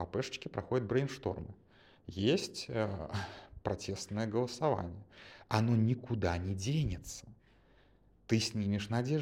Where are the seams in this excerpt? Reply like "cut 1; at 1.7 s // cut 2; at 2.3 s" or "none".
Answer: none